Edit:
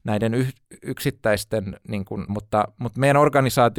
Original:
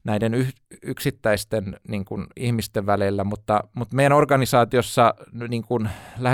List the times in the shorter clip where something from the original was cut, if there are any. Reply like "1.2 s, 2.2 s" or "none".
2.3 s